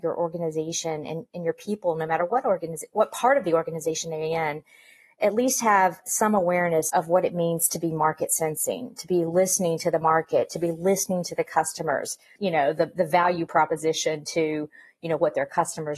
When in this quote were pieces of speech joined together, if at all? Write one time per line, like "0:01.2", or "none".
0:06.9
0:12.4